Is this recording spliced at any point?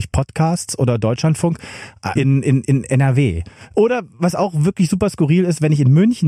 yes; 2 cuts; at 2.2 s, 3.7 s

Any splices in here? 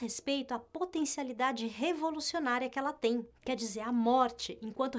no; 0 cuts

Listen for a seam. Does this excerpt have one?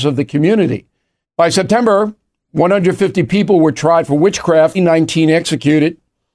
yes; 2 cuts; at 1.2 s, 4.7 s

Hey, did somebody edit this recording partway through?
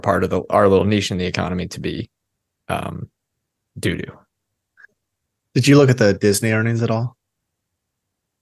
no; 0 cuts

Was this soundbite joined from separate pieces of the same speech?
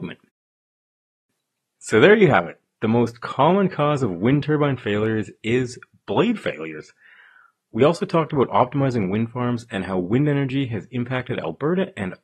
no; 0 cuts

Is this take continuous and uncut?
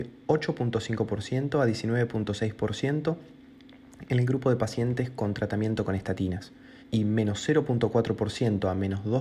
no; 1 cut; at 6.8 s

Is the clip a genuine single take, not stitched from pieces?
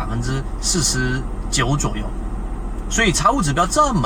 no; 1 cut; at 2.8 s

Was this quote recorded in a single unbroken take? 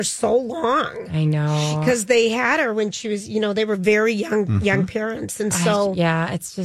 yes; 0 cuts

